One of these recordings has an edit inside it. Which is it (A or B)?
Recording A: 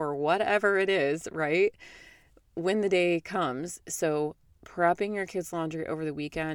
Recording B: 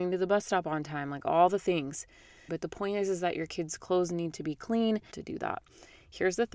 B